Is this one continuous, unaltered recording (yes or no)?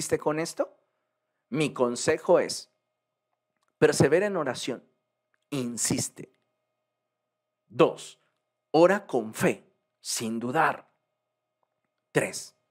yes